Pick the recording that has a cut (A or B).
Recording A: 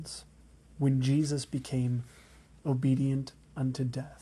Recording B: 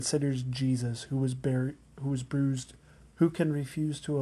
B